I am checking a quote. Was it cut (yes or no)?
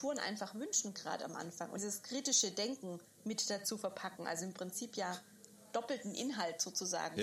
yes